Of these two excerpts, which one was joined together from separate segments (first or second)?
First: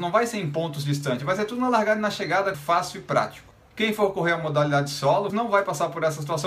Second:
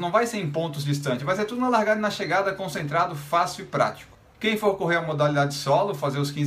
first